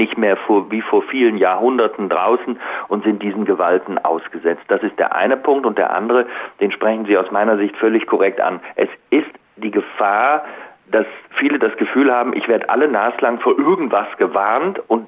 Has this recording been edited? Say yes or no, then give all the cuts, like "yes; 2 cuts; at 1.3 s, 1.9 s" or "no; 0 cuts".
no; 0 cuts